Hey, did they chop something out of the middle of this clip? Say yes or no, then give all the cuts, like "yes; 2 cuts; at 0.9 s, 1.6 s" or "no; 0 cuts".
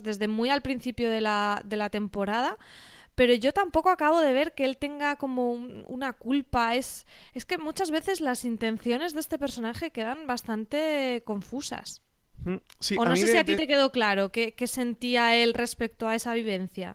no; 0 cuts